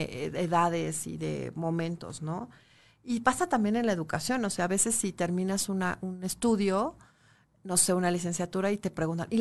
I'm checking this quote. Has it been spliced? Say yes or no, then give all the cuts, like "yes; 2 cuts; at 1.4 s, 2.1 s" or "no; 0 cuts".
no; 0 cuts